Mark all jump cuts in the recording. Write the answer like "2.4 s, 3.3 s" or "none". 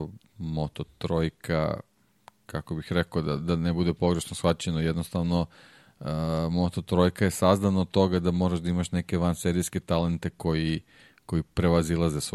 none